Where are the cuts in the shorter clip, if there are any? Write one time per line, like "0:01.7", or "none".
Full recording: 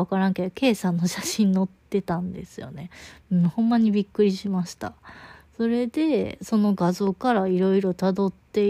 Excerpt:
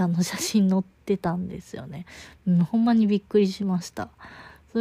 none